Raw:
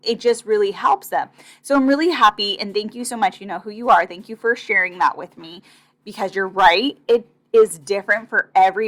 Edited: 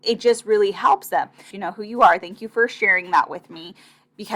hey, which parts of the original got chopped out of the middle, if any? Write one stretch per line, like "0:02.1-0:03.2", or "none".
0:01.5-0:03.4